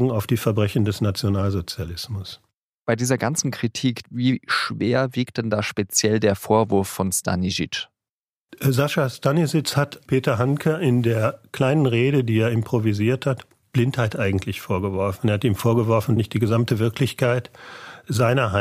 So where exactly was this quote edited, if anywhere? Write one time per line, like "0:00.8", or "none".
0:04.0